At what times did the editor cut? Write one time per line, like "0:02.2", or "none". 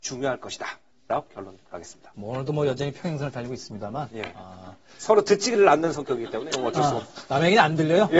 0:02.1